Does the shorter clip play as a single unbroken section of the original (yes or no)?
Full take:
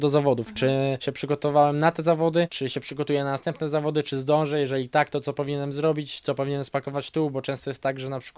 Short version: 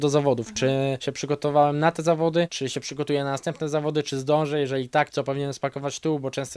no